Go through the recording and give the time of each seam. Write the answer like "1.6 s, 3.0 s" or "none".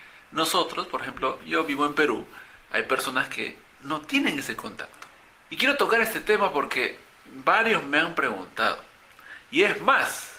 5.5 s